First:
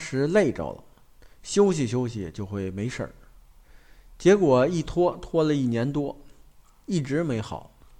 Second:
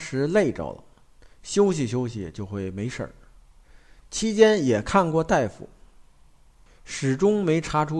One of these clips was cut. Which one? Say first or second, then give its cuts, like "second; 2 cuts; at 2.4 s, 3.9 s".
second; 1 cut; at 4.0 s